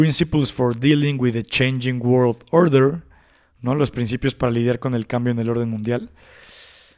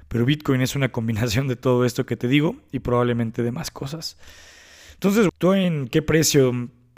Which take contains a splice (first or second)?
second